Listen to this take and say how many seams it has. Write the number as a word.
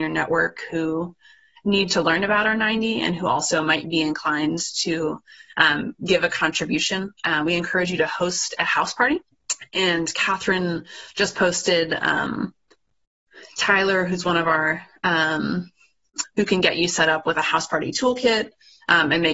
one